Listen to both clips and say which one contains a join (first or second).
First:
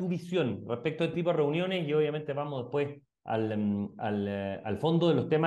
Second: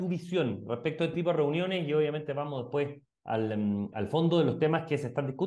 second